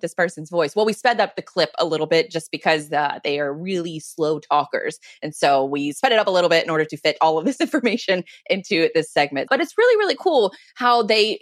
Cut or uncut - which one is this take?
cut